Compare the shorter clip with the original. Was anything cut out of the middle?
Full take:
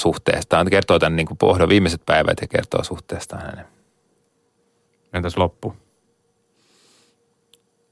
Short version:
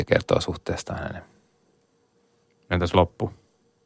no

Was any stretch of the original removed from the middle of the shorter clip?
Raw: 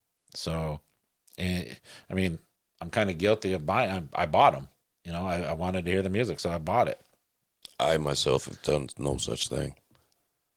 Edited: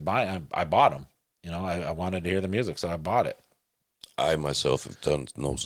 no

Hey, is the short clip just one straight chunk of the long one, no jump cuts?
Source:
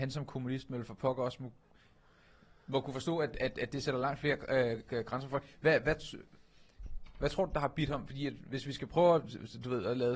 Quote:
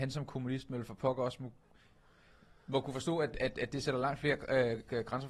yes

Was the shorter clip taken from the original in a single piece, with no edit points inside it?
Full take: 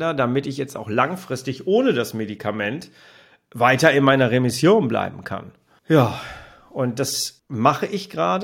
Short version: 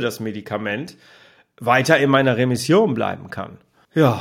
yes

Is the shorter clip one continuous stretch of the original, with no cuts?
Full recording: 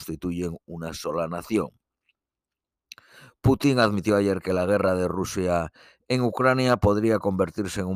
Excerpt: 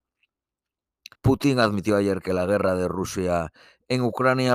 no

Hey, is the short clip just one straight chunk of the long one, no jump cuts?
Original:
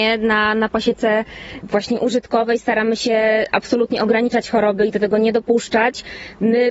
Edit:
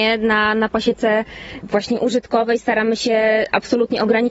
yes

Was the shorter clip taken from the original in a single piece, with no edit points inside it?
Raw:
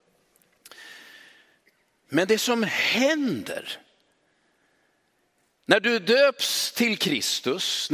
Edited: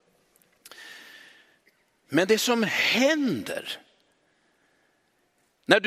yes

